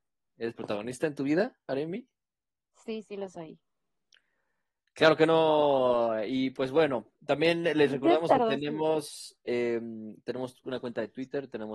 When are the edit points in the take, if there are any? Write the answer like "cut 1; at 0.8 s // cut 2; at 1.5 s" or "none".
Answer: none

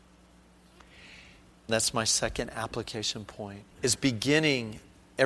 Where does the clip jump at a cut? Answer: cut 1; at 1.7 s // cut 2; at 3.7 s

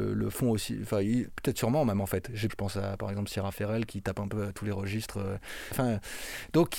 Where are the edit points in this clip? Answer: cut 1; at 2.5 s // cut 2; at 5.7 s

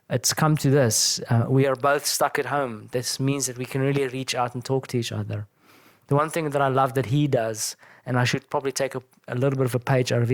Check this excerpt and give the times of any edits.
none

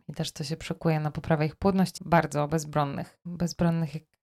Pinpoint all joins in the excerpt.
cut 1; at 2.0 s

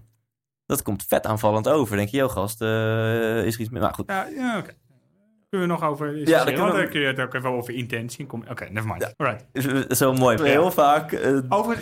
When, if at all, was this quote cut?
cut 1; at 9.1 s // cut 2; at 10.4 s

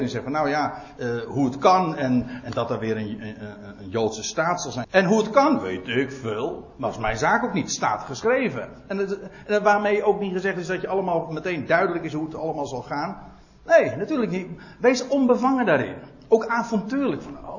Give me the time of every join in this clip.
cut 1; at 4.8 s

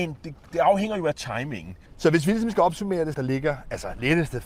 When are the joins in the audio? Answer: cut 1; at 1.9 s // cut 2; at 3.1 s

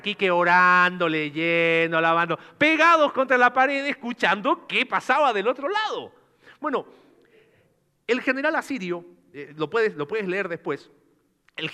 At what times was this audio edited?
none

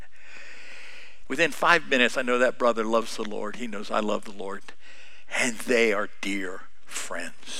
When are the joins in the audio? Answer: cut 1; at 1.2 s

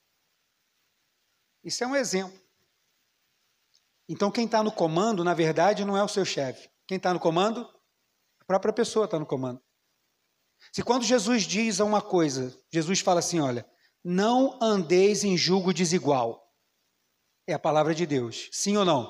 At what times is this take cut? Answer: none

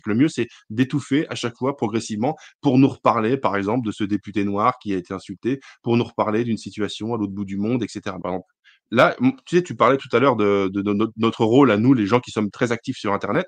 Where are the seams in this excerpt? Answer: cut 1; at 8.2 s

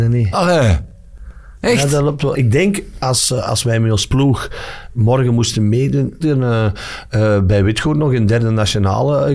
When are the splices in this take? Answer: cut 1; at 2.3 s // cut 2; at 6.2 s

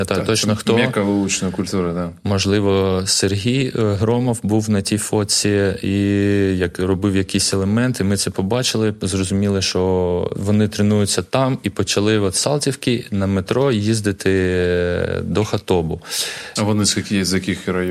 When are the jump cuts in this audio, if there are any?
cut 1; at 16.6 s

